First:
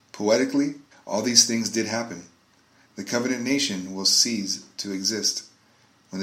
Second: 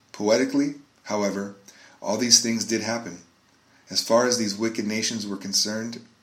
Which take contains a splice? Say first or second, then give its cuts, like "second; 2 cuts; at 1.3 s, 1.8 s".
first; 2 cuts; at 0.9 s, 2.8 s